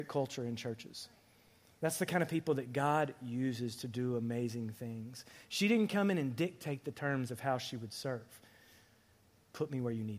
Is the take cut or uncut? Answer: uncut